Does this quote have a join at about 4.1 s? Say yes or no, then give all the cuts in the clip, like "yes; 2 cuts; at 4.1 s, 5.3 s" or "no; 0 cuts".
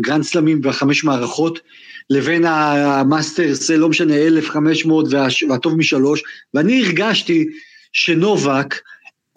no; 0 cuts